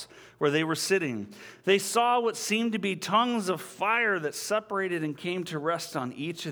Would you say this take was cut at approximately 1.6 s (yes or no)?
no